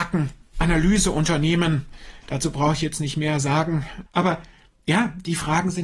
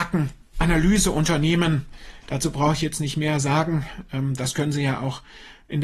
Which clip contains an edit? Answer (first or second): first